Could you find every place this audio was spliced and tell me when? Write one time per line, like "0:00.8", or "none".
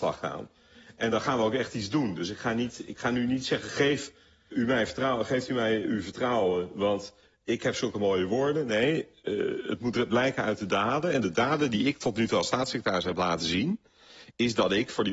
0:04.5